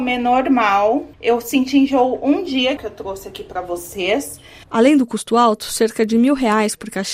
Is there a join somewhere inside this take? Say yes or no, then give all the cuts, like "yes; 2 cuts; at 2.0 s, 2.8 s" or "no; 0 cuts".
yes; 3 cuts; at 1.1 s, 2.8 s, 4.6 s